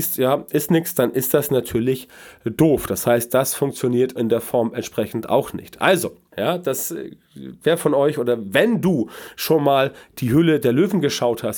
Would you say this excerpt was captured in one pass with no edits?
no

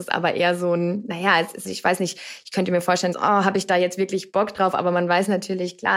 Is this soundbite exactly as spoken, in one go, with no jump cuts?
no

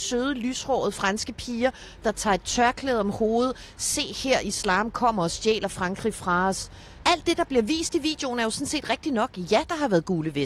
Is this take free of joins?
no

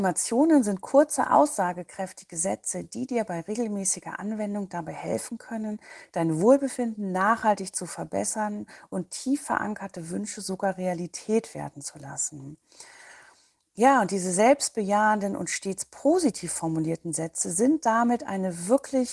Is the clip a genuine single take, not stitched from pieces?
yes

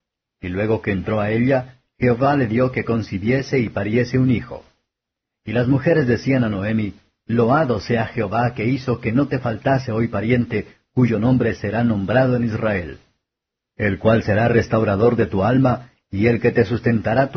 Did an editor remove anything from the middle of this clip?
no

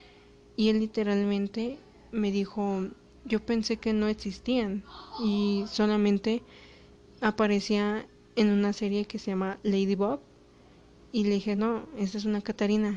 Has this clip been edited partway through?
no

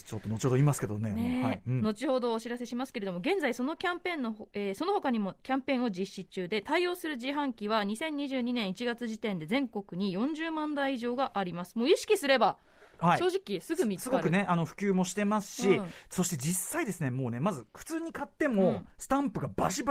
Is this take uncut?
yes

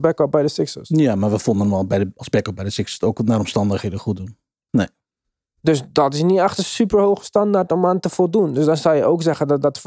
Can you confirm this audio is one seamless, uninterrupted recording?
no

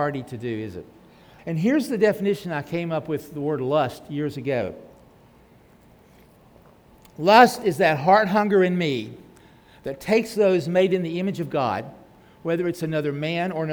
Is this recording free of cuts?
no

